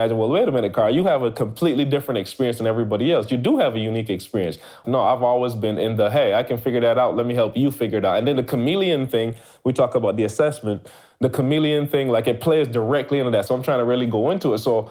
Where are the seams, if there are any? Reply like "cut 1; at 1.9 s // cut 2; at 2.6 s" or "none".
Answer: cut 1; at 4.8 s // cut 2; at 13.5 s